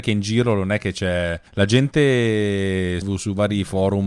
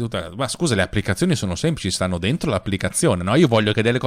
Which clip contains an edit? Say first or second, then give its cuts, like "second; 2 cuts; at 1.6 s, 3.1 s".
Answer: first; 2 cuts; at 1.5 s, 3.0 s